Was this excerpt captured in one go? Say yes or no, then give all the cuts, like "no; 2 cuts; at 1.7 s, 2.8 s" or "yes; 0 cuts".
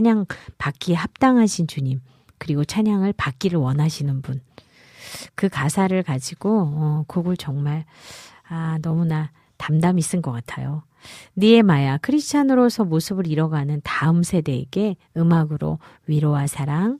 yes; 0 cuts